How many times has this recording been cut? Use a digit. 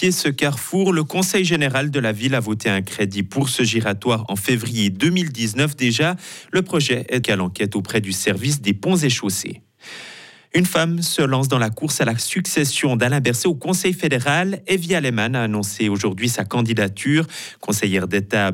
1